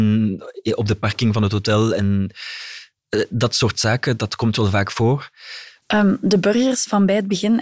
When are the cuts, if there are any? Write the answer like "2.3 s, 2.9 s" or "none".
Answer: 5.8 s